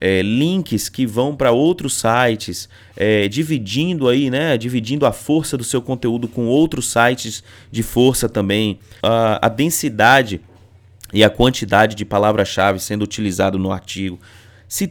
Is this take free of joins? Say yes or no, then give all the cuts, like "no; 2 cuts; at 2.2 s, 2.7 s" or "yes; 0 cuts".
no; 1 cut; at 9.0 s